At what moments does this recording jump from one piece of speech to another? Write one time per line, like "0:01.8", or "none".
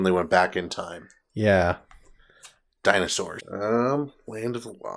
0:03.4

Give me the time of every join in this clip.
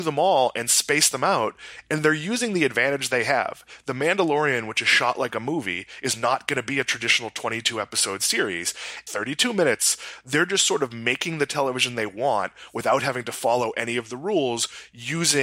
0:09.1

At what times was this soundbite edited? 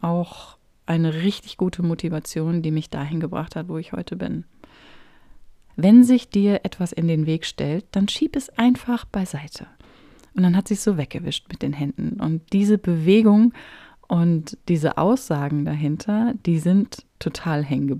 0:05.7

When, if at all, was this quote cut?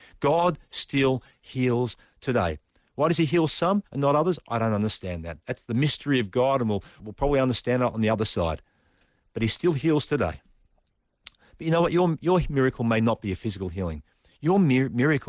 0:07.0

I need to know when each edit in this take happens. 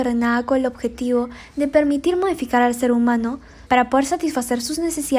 0:03.7

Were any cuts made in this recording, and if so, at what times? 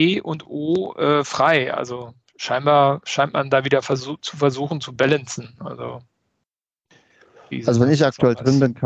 none

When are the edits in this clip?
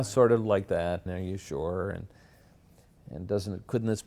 0:01.1

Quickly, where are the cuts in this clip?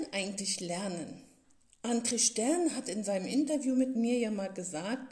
none

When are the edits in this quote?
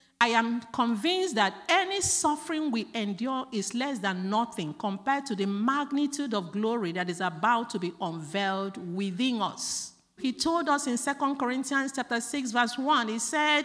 0:10.2

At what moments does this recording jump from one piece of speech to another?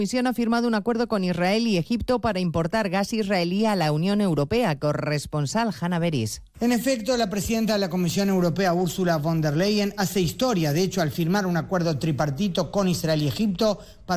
none

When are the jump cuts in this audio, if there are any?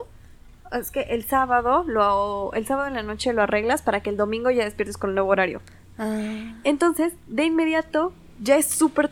none

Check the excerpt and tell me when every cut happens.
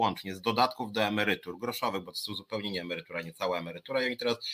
none

